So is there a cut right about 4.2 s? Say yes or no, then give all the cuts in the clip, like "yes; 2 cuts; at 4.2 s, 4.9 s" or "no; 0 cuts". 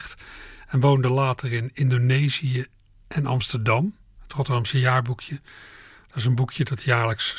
yes; 1 cut; at 4.2 s